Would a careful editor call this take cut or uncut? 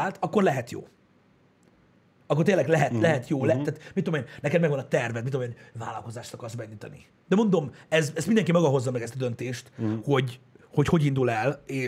cut